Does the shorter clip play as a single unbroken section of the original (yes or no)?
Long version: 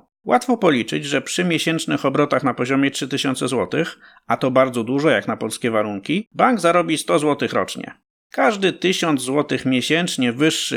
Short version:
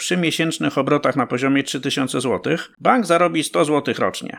no